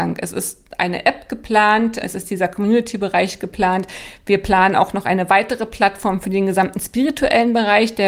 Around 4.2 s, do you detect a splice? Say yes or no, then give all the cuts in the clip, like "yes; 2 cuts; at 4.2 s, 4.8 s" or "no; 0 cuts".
no; 1 cut; at 2.0 s